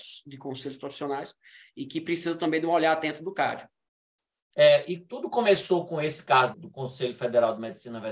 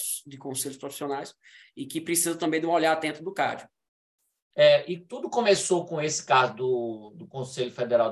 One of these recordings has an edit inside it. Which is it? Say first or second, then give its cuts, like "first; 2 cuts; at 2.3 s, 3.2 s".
first; 1 cut; at 6.5 s